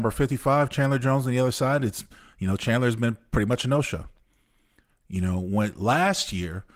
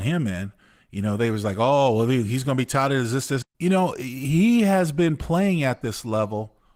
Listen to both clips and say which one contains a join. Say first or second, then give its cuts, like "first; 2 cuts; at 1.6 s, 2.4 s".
second; 1 cut; at 3.4 s